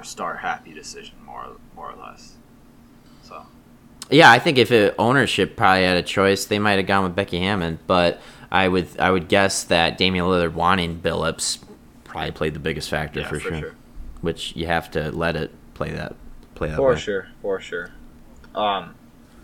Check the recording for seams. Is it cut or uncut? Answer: uncut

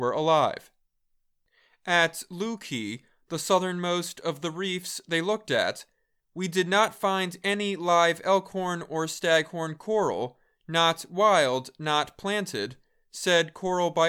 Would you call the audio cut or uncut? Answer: uncut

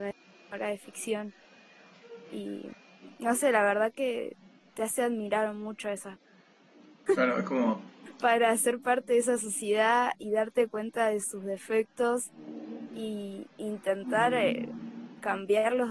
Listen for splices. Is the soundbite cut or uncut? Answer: cut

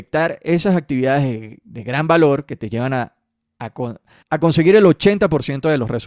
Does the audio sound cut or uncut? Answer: cut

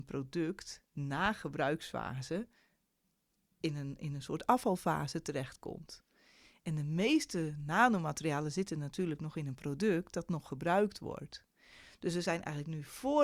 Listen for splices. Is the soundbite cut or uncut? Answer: uncut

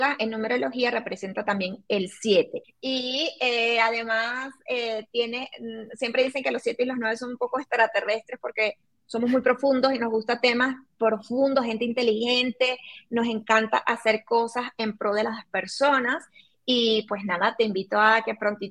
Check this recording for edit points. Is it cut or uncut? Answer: cut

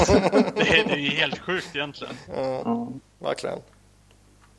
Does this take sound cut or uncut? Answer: cut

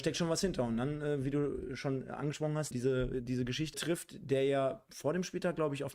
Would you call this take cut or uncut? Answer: cut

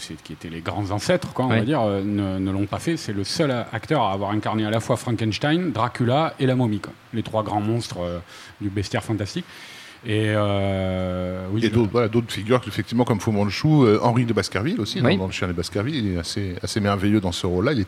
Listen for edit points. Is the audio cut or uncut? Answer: uncut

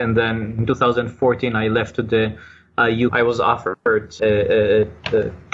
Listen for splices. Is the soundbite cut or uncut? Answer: cut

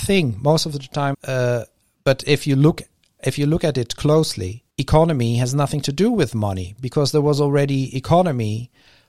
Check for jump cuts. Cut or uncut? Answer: cut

